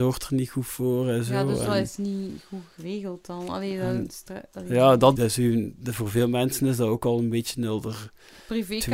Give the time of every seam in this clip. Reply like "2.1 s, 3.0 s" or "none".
5.1 s